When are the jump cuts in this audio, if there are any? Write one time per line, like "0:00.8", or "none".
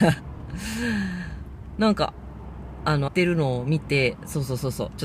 0:03.1